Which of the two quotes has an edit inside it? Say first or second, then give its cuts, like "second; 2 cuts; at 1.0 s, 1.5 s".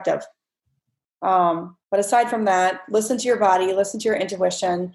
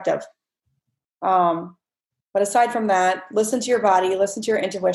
first; 1 cut; at 1.8 s